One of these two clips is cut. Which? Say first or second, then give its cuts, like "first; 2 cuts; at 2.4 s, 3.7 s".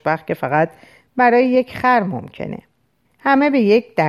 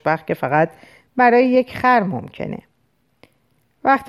first; 1 cut; at 3.1 s